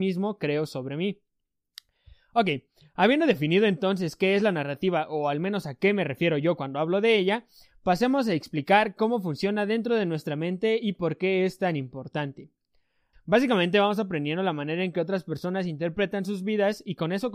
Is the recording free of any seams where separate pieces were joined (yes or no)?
no